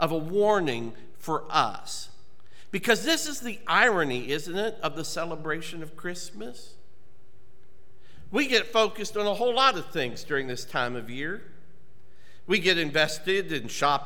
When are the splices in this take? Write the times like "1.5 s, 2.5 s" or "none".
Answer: none